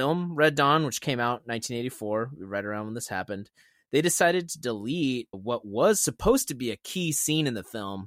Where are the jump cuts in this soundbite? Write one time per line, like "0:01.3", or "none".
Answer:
0:05.3